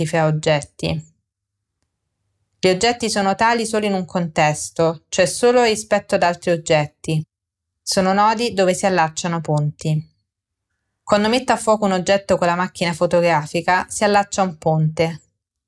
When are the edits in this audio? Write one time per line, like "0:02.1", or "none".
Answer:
none